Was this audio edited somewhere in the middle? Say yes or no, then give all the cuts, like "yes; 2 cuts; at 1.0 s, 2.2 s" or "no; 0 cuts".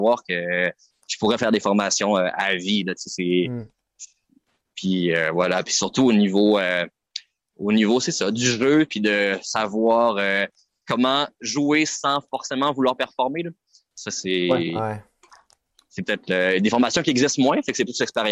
no; 0 cuts